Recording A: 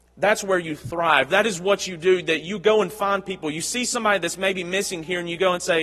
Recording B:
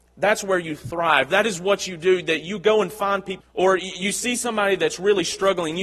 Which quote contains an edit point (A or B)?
B